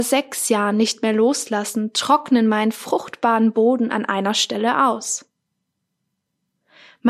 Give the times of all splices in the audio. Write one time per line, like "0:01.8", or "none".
none